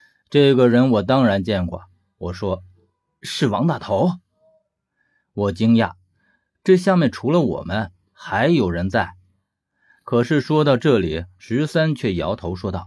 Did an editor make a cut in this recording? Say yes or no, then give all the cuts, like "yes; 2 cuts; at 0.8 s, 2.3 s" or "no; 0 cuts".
yes; 1 cut; at 5.2 s